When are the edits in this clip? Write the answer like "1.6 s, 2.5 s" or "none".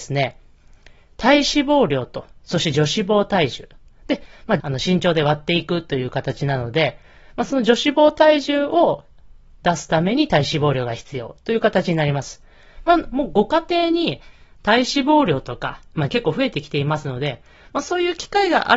4.6 s, 16.1 s

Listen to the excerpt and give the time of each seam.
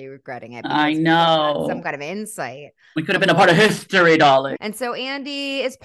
4.6 s

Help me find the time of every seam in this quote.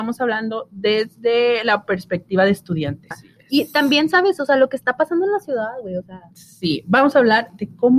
3.1 s

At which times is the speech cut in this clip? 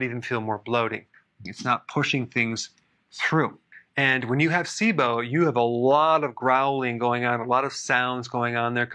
1.5 s

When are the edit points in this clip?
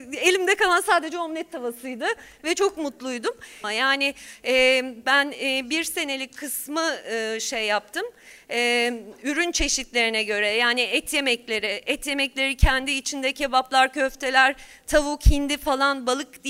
3.6 s

